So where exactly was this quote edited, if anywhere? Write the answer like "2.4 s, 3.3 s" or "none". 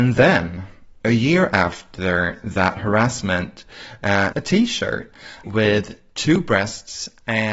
4.3 s, 5.4 s